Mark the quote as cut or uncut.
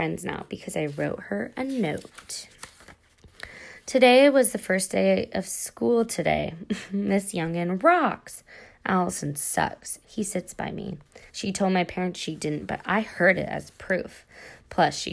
cut